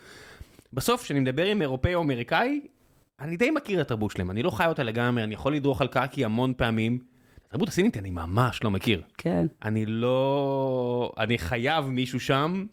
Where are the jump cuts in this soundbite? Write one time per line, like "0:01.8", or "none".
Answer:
none